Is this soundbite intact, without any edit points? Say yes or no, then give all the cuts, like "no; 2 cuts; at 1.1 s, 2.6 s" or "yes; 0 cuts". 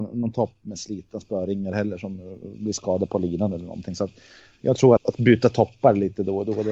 no; 1 cut; at 5.0 s